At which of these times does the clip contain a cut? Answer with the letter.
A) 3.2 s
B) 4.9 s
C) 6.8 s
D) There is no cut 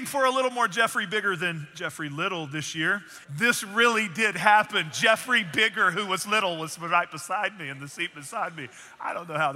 A